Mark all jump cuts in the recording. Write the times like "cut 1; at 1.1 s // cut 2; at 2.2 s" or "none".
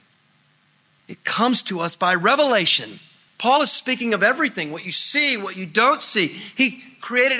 cut 1; at 1.0 s // cut 2; at 3.3 s